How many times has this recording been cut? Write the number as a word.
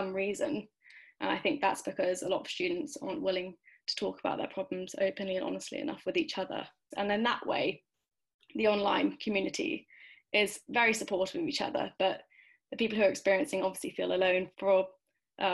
two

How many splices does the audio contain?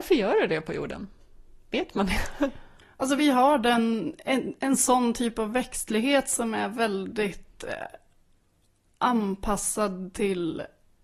zero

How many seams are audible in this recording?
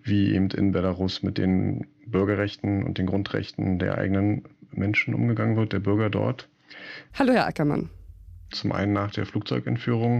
two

